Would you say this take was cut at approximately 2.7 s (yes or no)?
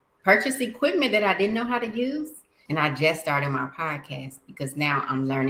yes